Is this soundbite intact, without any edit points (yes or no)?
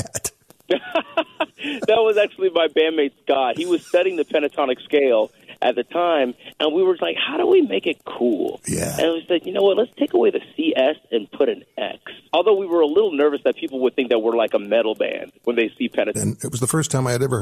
no